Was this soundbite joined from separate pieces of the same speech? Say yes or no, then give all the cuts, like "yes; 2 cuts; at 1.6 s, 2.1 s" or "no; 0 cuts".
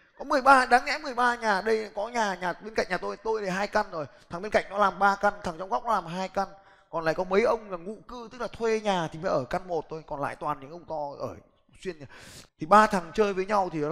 yes; 1 cut; at 12.5 s